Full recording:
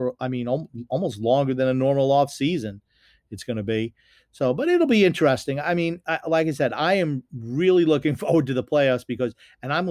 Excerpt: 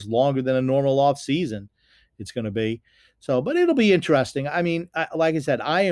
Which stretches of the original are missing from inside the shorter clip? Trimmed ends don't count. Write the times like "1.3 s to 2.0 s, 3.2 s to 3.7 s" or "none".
none